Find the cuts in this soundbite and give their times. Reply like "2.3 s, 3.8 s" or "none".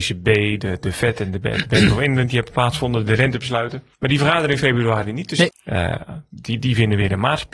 3.9 s, 5.5 s